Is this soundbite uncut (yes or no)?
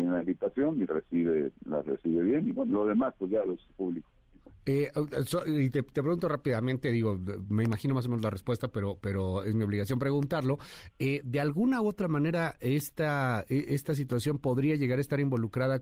yes